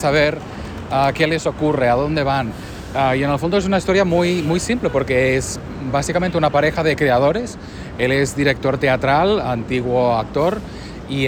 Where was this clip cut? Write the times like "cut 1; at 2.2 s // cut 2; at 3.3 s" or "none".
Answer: none